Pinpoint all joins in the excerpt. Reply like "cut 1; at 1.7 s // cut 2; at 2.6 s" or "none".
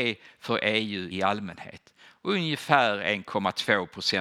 cut 1; at 1.1 s